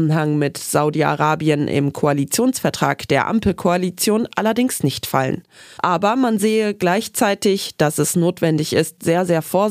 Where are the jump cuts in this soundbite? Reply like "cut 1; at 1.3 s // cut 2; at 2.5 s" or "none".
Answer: cut 1; at 5.8 s